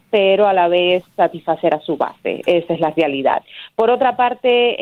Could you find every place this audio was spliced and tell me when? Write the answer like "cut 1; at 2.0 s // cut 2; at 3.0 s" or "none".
none